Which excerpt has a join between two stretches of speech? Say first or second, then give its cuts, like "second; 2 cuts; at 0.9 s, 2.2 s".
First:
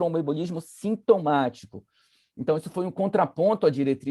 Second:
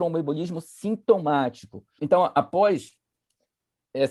second; 1 cut; at 2.0 s